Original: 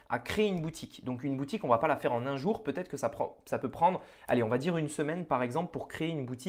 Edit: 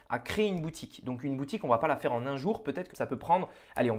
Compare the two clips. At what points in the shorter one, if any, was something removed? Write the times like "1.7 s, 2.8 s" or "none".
2.9 s